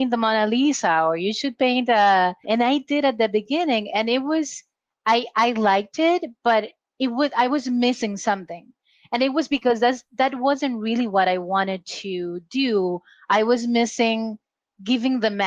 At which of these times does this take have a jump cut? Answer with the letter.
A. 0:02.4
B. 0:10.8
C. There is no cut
A